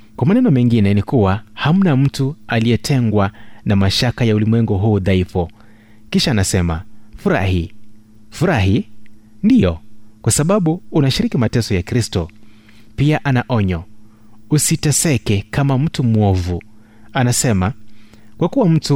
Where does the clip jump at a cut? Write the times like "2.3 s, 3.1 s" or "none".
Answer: none

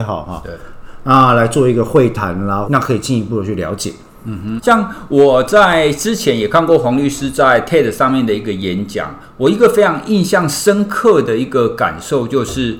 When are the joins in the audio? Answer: 2.7 s, 4.6 s

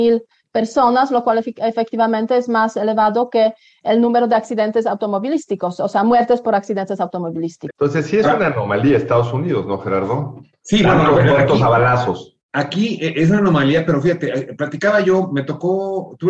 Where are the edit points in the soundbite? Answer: 7.7 s

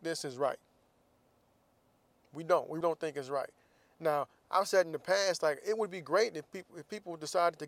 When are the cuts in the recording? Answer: 2.8 s

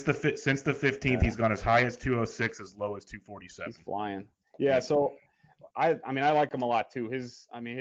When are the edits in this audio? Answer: 5.7 s

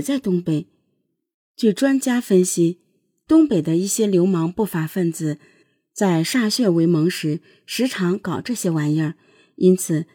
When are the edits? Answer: 1.3 s

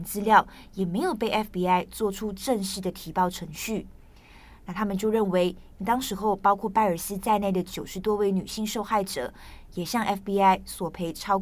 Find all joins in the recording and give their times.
5.8 s

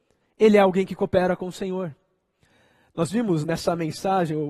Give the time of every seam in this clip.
3.4 s

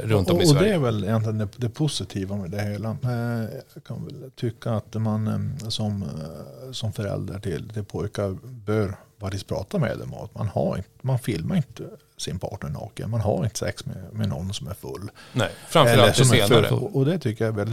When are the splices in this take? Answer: 16.7 s

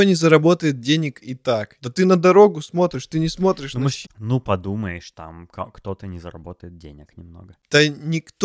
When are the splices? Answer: 1.8 s, 4.0 s

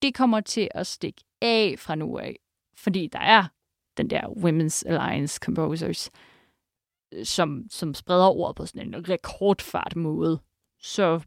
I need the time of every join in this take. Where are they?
1.3 s

